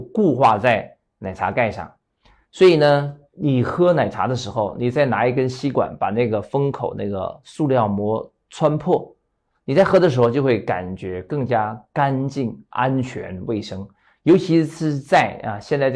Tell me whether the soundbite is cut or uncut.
uncut